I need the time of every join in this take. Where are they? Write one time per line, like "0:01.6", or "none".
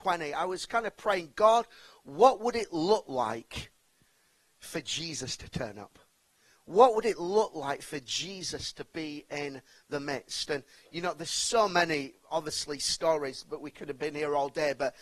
none